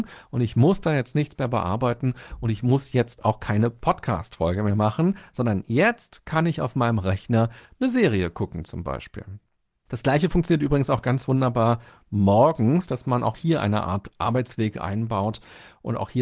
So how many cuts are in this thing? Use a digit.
0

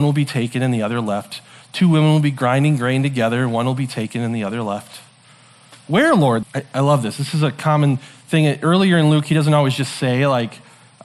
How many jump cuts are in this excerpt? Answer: 1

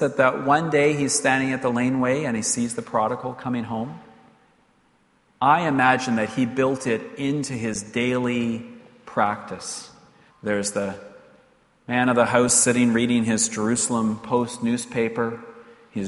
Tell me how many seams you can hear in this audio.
1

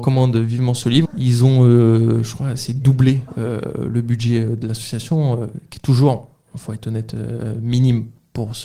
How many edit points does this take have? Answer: 1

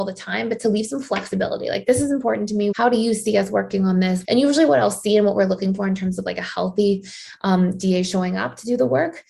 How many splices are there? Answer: 2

